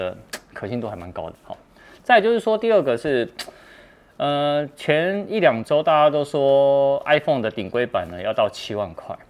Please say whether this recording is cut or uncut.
cut